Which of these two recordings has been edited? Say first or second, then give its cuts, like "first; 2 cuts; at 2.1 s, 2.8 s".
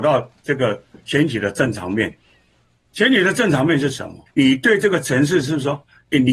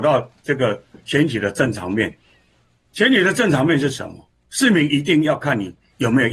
first; 1 cut; at 4.3 s